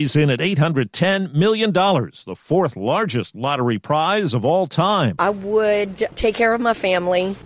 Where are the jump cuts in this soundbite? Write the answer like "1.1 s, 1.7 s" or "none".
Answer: none